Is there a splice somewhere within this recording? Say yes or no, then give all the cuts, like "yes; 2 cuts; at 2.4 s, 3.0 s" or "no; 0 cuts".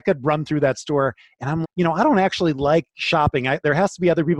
yes; 1 cut; at 1.6 s